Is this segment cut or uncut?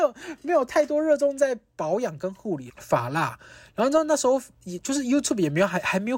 cut